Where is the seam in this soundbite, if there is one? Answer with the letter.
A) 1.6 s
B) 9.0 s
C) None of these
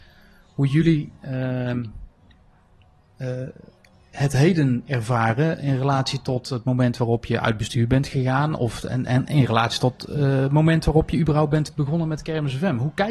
C